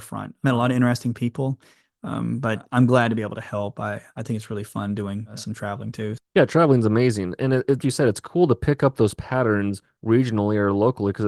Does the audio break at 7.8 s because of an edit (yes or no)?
yes